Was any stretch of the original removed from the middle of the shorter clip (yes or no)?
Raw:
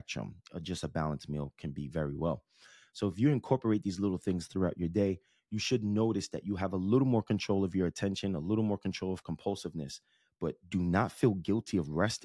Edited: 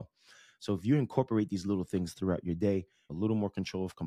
yes